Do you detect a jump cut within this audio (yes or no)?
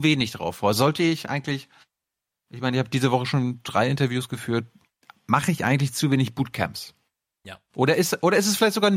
no